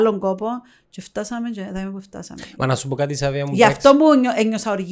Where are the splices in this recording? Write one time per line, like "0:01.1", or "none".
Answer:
none